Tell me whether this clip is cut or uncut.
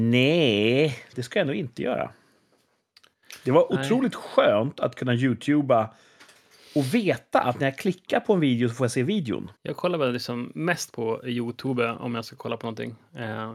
cut